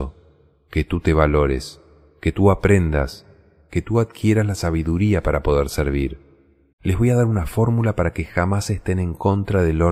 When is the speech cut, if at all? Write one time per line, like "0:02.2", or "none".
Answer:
0:06.7